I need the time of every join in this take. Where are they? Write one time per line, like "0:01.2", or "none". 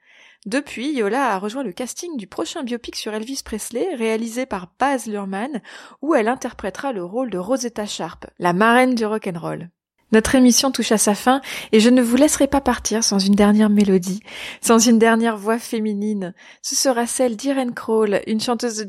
none